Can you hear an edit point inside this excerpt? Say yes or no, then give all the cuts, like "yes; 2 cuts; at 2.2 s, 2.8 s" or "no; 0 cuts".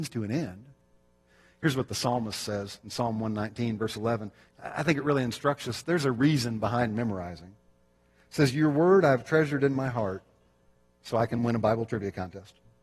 no; 0 cuts